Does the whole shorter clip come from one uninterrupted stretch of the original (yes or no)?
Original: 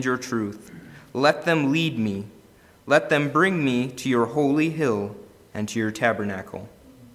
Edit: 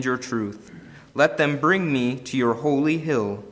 no